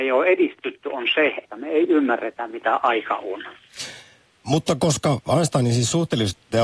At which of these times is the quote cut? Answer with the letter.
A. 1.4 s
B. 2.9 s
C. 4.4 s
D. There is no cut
A